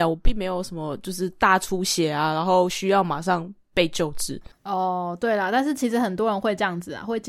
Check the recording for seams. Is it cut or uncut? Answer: uncut